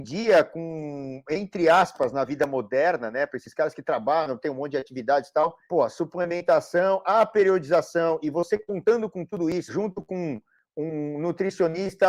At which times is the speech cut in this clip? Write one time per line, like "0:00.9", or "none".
0:05.7
0:09.7